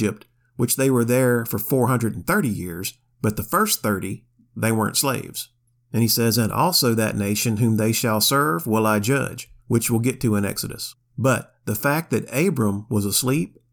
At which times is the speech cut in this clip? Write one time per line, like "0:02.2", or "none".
0:09.6